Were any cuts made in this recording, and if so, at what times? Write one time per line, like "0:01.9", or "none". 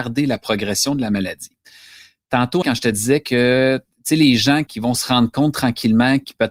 0:02.6